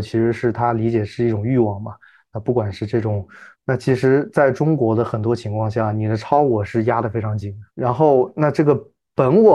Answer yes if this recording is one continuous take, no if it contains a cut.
no